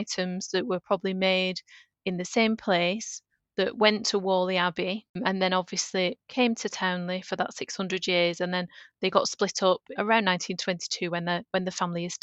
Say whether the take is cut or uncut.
cut